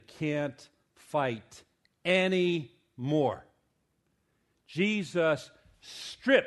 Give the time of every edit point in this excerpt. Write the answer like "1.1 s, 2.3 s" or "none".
none